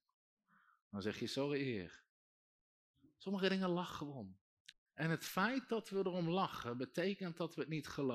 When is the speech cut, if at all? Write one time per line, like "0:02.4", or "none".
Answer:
0:04.7